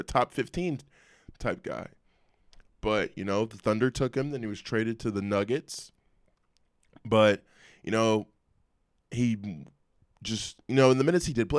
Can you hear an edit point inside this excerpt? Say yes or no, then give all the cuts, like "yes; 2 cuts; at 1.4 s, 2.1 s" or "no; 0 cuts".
no; 0 cuts